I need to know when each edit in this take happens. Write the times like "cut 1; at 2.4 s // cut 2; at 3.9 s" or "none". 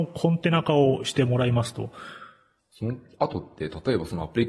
cut 1; at 2.6 s

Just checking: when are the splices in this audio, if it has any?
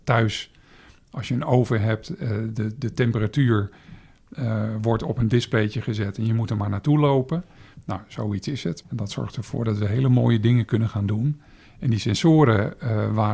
cut 1; at 8.8 s // cut 2; at 11.6 s

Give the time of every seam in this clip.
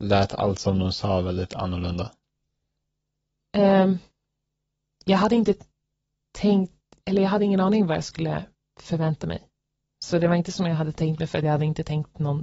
none

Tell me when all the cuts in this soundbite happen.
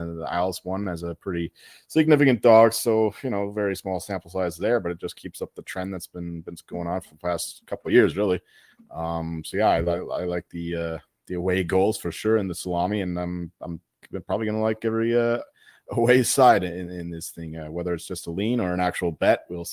none

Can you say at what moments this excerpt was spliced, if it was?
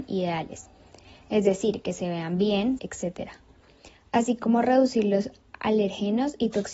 cut 1; at 2.8 s

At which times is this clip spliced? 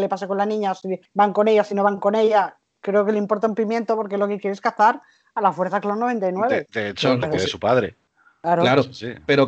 cut 1; at 7.2 s

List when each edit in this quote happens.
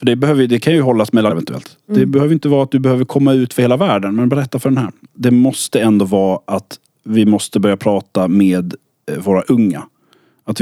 cut 1; at 1.3 s // cut 2; at 5.1 s

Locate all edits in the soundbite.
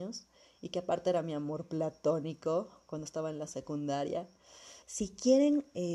cut 1; at 4.8 s

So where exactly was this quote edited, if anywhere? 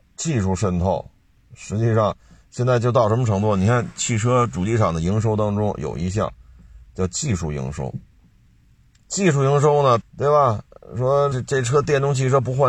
cut 1; at 10.0 s // cut 2; at 11.3 s

